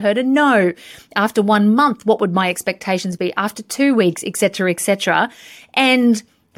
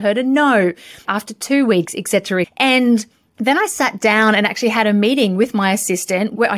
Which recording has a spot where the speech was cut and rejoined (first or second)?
second